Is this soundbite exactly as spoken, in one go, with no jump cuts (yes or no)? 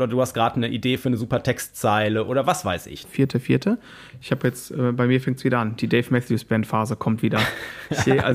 no